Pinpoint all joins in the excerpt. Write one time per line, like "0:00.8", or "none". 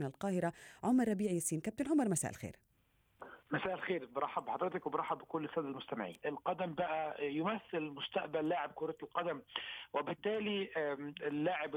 0:06.2